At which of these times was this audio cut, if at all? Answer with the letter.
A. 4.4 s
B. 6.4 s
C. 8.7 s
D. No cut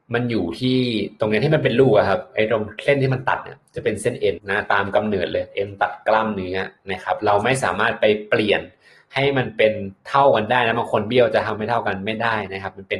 A